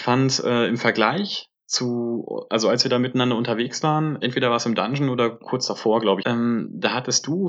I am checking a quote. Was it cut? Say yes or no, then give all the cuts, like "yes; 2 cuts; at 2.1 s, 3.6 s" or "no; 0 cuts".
yes; 1 cut; at 6.2 s